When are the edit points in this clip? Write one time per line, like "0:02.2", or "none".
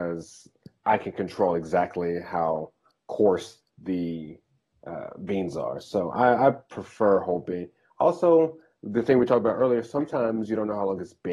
none